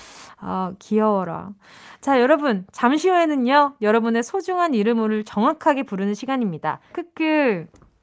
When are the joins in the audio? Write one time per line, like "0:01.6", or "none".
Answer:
0:06.9